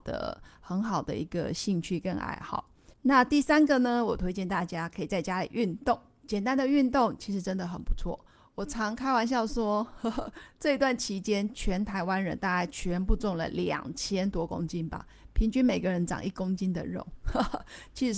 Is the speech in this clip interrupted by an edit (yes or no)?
yes